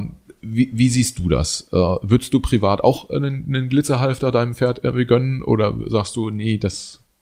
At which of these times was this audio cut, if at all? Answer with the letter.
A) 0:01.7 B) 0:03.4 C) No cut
C